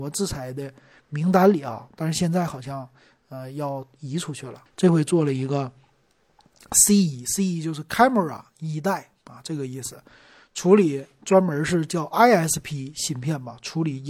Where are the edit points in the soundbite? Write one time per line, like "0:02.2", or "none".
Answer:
0:04.7